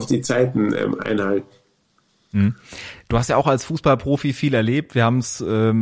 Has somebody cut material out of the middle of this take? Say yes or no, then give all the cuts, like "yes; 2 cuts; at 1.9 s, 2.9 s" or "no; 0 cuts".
no; 0 cuts